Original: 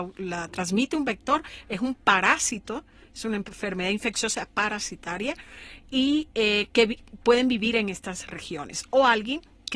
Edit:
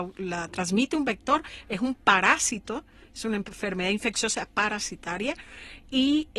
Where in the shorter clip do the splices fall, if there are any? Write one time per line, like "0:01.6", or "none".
none